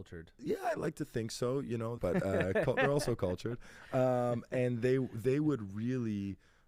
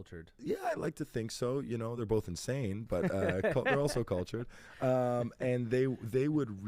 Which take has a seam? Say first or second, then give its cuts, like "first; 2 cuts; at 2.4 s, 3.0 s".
first; 1 cut; at 2.0 s